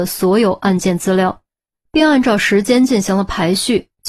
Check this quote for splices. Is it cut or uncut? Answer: uncut